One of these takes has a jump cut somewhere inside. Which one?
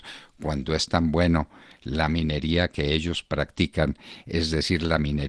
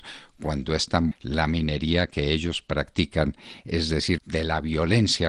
second; 2 cuts; at 1.1 s, 4.2 s

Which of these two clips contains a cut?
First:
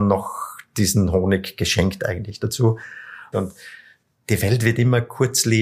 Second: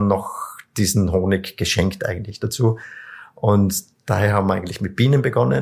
first; 1 cut; at 3.3 s

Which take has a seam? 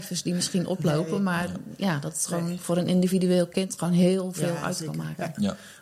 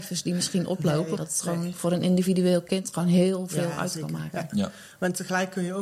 second; 1 cut; at 1.2 s

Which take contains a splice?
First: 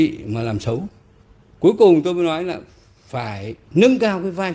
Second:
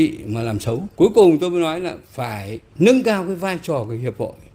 second; 2 cuts; at 0.9 s, 2.0 s

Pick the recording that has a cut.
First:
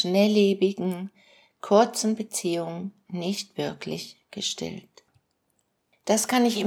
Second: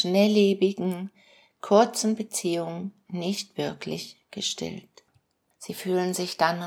second; 1 cut; at 5.5 s

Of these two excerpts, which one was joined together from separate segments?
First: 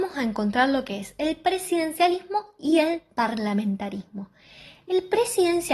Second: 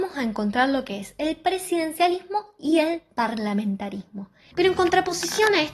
second; 1 cut; at 4.5 s

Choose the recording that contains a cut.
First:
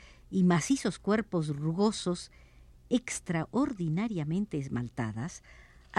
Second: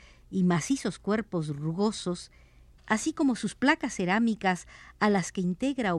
second; 1 cut; at 2.8 s

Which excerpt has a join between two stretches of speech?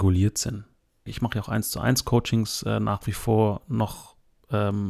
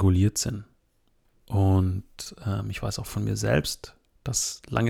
first; 1 cut; at 1.1 s

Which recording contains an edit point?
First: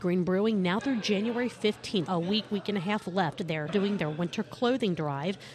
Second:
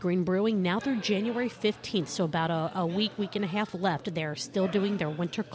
first; 2 cuts; at 2.1 s, 3.7 s

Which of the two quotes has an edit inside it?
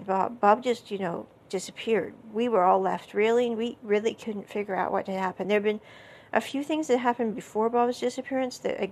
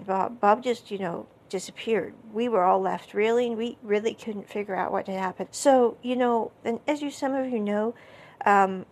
second; 2 cuts; at 5.4 s, 6.6 s

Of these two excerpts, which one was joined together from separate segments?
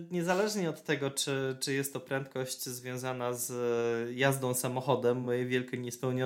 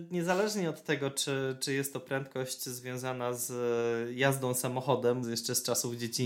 second; 1 cut; at 5.2 s

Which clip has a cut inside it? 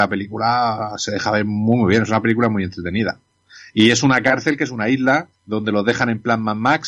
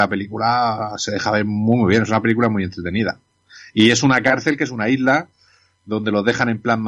first; 1 cut; at 5.3 s

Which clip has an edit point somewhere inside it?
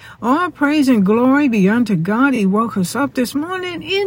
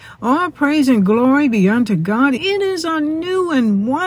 second; 1 cut; at 2.4 s

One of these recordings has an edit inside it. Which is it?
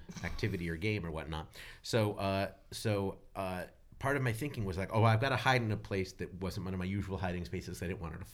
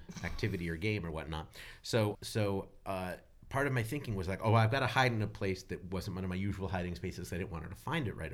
second; 1 cut; at 2.1 s

